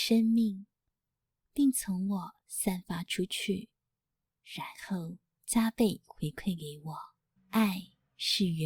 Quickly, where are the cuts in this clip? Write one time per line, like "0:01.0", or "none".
0:07.4